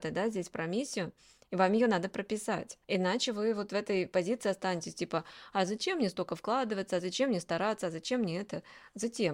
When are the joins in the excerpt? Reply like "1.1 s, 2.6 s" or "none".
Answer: 2.8 s